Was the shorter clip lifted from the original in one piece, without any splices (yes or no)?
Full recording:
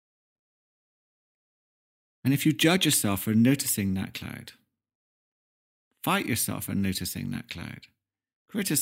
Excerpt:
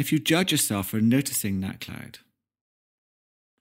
yes